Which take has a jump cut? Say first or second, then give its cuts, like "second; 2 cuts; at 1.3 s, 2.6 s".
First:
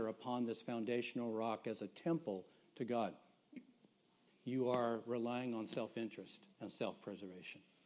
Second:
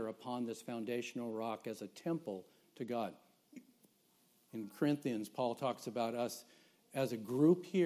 first; 2 cuts; at 4.3 s, 6.5 s